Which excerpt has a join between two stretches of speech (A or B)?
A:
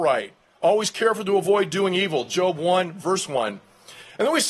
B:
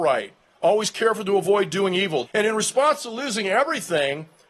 B